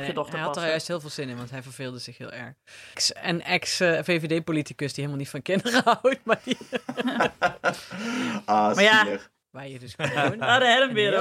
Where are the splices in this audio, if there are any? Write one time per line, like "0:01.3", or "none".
0:02.9
0:09.4